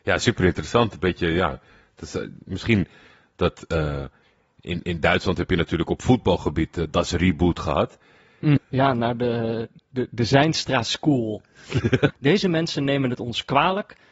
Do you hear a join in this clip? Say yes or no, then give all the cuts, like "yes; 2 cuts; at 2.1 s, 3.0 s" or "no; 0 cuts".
yes; 2 cuts; at 8.6 s, 12.1 s